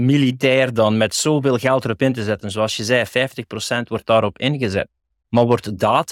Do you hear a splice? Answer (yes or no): no